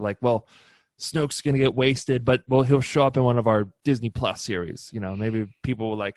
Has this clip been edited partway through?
no; 0 cuts

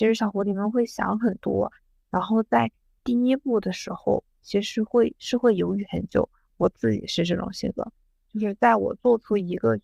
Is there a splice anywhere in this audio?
no; 0 cuts

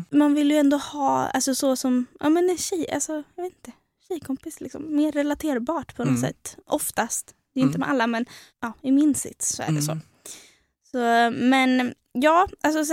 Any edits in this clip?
no; 0 cuts

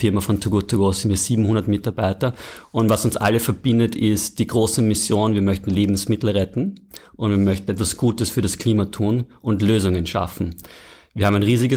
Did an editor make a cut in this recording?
no; 0 cuts

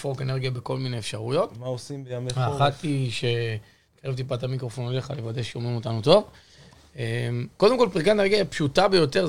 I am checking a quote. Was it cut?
no; 0 cuts

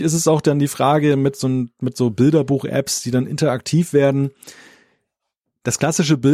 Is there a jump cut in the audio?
no; 0 cuts

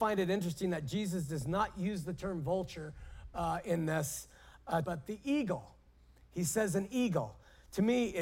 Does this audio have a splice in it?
yes; 1 cut; at 4.8 s

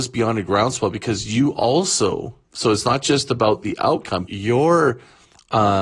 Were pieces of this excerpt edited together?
yes; 2 cuts; at 2.5 s, 4.3 s

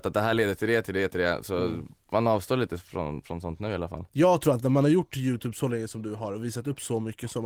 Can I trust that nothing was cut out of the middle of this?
no; 1 cut; at 4.1 s

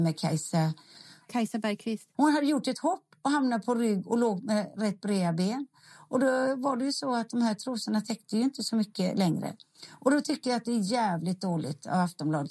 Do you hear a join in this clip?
yes; 1 cut; at 2.1 s

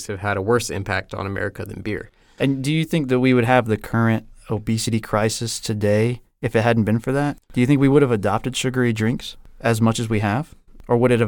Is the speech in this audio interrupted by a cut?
no; 0 cuts

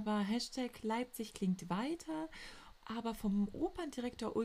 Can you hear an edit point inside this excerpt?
yes; 1 cut; at 2.7 s

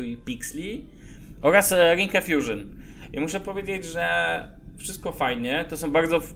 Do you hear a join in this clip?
no; 0 cuts

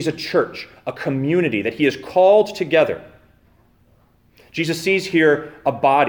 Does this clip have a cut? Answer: no; 0 cuts

